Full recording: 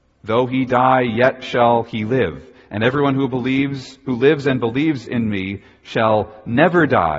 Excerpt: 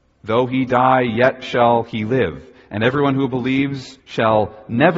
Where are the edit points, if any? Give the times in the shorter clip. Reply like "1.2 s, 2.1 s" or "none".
4.0 s